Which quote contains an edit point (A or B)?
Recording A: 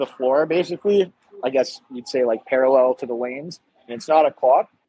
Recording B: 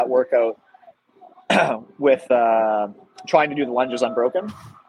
A